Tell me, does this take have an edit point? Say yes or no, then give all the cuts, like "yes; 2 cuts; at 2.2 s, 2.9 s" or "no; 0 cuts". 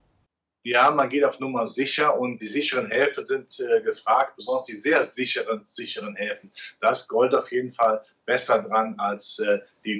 yes; 1 cut; at 2.4 s